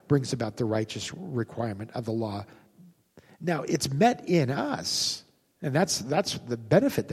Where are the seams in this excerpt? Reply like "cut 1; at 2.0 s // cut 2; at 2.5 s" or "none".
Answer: none

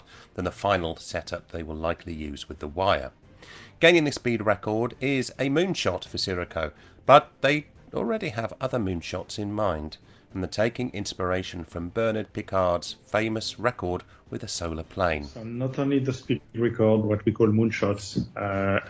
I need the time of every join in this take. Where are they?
cut 1; at 17.0 s

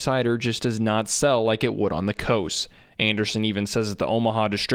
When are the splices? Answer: none

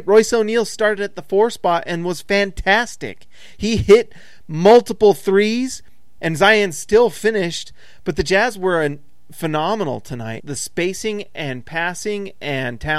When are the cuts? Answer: cut 1; at 6.2 s // cut 2; at 10.4 s

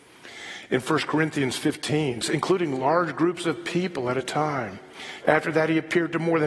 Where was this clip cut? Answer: cut 1; at 2.2 s // cut 2; at 5.2 s

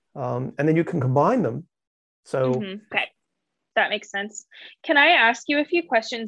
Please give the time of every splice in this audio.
cut 1; at 2.9 s

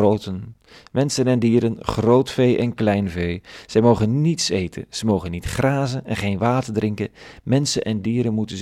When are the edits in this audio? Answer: none

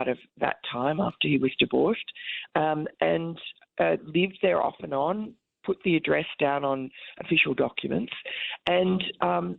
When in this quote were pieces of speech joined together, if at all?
none

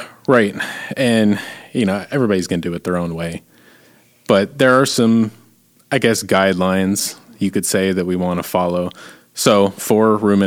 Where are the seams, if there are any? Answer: none

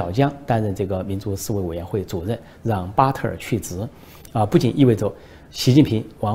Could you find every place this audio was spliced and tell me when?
none

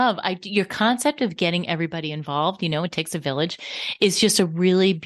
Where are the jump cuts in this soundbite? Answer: none

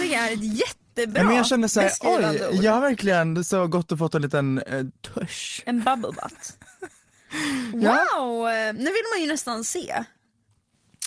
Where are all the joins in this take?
none

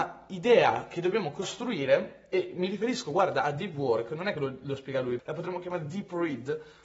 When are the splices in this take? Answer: none

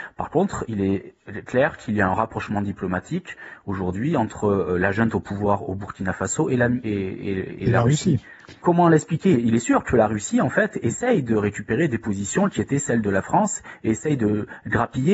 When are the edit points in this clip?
cut 1; at 6.8 s

